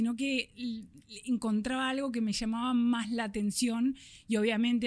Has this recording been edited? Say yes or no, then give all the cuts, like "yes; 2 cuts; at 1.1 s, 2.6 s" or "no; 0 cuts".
no; 0 cuts